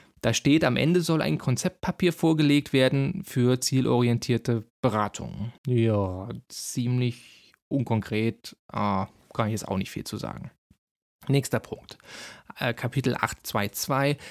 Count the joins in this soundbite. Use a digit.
1